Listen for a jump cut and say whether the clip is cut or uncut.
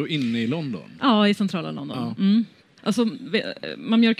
cut